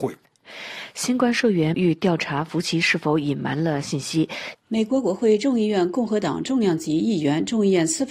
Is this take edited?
yes; 2 cuts; at 1.7 s, 4.5 s

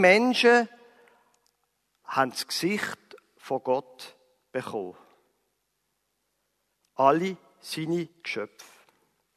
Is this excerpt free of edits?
yes; 0 cuts

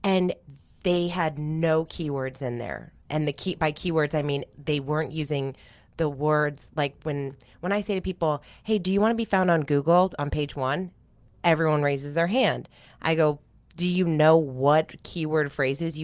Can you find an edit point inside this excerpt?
no; 0 cuts

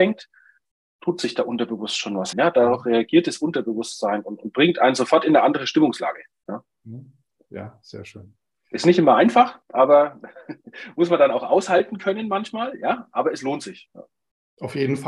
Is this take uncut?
no; 1 cut; at 2.3 s

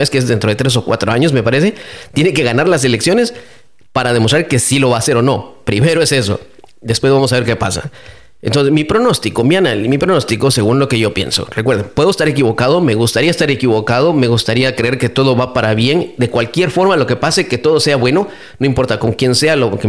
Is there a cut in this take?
no; 0 cuts

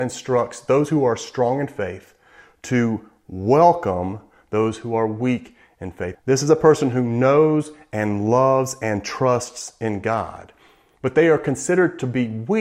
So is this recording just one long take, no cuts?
no; 1 cut; at 6.1 s

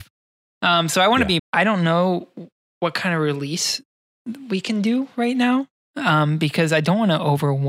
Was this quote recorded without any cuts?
no; 1 cut; at 1.4 s

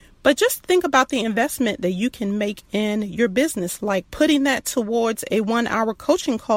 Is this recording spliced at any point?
no; 0 cuts

